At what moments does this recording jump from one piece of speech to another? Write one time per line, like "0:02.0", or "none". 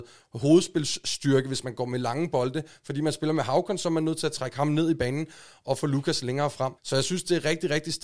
0:06.8